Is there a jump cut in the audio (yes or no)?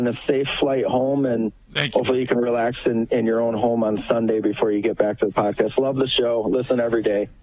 no